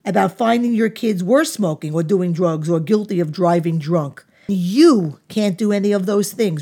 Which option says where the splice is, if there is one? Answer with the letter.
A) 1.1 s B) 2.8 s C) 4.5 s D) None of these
C